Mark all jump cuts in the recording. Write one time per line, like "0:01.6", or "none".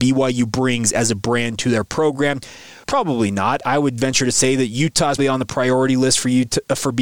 0:02.8
0:05.2